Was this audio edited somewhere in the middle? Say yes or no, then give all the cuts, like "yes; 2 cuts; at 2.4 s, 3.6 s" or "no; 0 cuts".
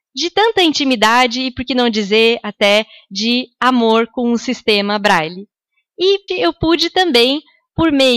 yes; 1 cut; at 6.3 s